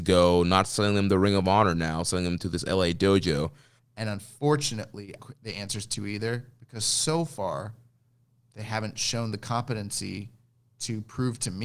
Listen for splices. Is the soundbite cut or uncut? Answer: cut